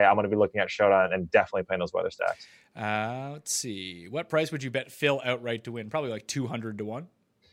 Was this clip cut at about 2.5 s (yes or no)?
no